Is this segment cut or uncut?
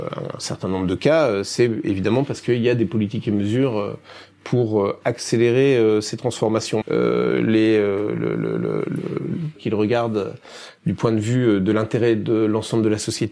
cut